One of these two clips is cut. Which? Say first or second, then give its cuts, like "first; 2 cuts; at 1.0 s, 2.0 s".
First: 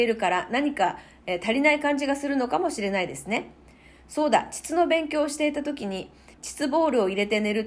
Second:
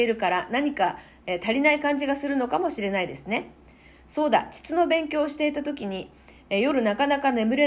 first; 1 cut; at 6.3 s